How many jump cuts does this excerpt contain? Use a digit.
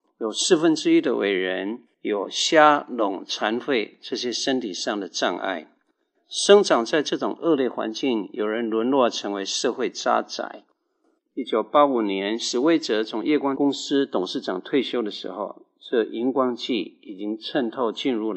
1